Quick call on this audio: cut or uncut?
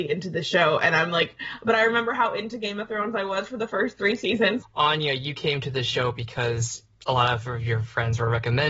cut